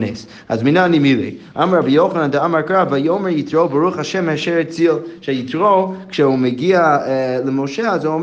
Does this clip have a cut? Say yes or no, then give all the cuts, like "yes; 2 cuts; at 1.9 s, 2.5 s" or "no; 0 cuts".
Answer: no; 0 cuts